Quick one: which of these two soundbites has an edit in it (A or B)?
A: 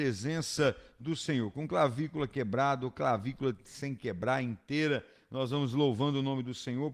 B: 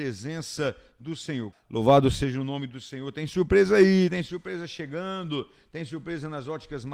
B